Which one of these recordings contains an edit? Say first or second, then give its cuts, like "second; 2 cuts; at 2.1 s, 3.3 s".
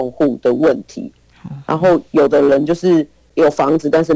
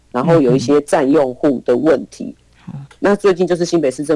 second; 1 cut; at 2.9 s